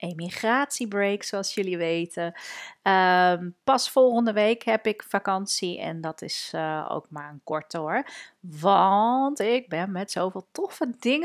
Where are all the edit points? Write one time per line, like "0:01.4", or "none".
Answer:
none